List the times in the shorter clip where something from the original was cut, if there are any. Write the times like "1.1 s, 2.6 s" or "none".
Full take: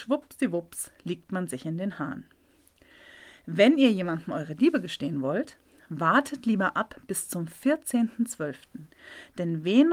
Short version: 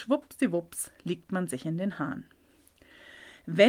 none